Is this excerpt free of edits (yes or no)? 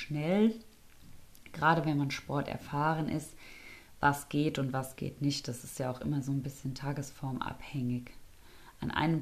yes